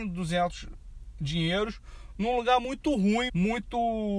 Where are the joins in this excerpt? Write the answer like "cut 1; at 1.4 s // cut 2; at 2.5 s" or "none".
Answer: cut 1; at 3.3 s

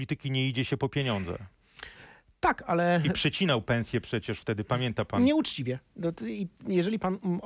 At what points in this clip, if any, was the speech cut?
none

